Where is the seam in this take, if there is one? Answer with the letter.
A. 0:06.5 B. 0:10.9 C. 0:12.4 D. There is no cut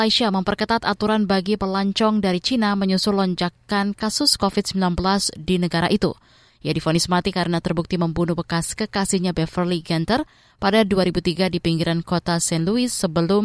A